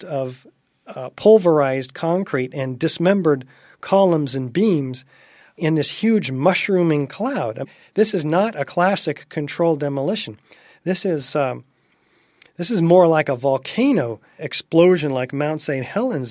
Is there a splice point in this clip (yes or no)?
yes